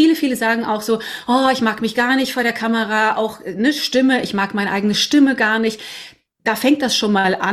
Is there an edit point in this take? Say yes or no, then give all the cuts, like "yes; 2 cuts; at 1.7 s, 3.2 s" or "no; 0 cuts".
no; 0 cuts